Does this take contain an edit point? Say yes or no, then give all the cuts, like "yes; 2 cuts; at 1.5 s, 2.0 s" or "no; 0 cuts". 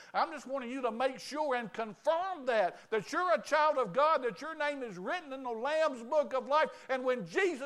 no; 0 cuts